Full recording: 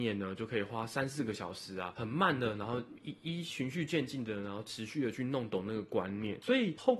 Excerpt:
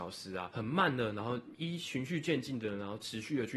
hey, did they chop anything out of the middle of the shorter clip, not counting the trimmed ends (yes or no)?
yes